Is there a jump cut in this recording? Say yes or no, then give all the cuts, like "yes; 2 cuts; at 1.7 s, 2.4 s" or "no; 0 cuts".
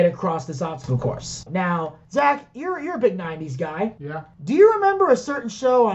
yes; 1 cut; at 1.5 s